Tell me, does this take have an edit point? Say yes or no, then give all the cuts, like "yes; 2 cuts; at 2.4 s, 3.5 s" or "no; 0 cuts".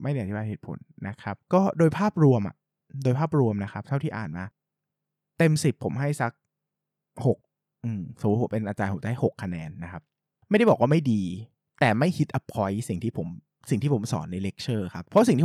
no; 0 cuts